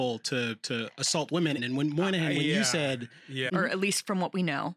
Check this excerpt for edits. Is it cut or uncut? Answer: cut